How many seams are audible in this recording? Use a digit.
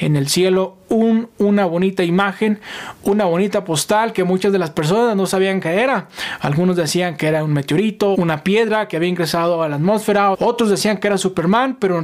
2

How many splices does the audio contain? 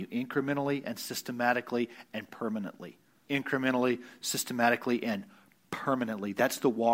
1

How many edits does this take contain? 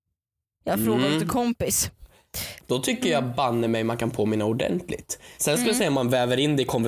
2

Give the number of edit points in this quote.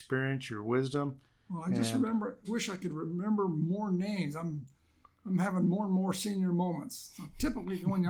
1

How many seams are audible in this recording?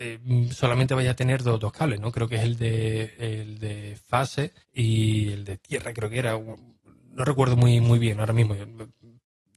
1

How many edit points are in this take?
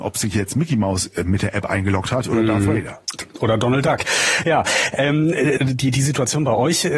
2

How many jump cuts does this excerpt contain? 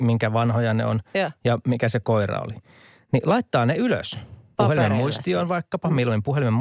1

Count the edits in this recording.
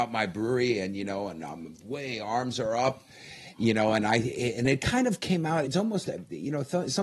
2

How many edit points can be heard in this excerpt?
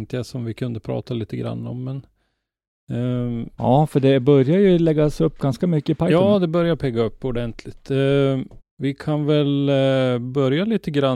1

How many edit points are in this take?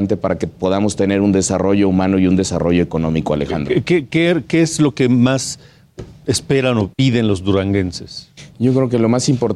1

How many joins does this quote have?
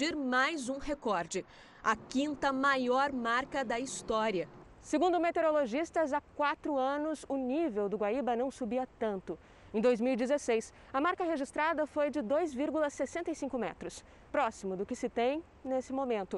1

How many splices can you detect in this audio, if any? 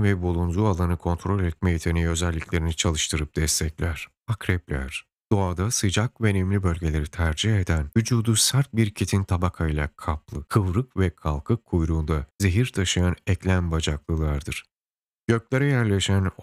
2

